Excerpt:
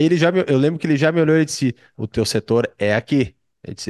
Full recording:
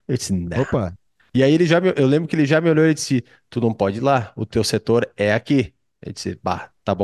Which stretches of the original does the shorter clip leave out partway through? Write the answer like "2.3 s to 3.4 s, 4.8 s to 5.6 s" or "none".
3.4 s to 4.3 s